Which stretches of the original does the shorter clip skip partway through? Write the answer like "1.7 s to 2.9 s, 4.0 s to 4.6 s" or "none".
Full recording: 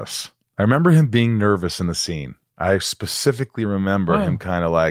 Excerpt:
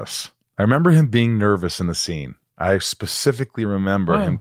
none